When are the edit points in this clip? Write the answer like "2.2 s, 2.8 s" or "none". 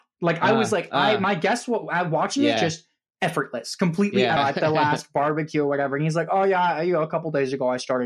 2.6 s, 4.4 s